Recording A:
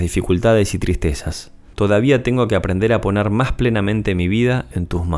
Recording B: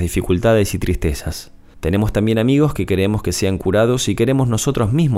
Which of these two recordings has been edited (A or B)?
A